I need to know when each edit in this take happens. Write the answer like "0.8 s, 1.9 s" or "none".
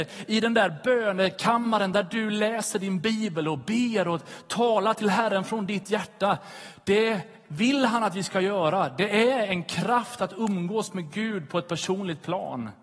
none